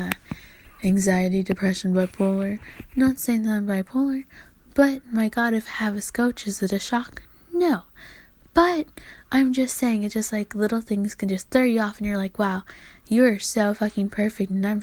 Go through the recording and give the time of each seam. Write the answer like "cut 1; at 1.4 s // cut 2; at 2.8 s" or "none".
none